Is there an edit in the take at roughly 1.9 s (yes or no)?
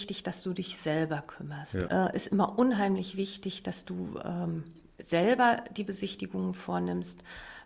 yes